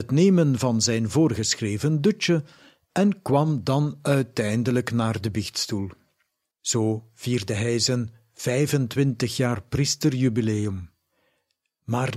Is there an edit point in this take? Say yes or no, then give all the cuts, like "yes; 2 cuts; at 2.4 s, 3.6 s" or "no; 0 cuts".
yes; 1 cut; at 6.5 s